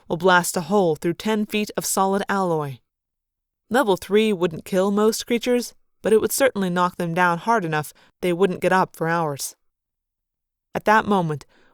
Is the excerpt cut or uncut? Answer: uncut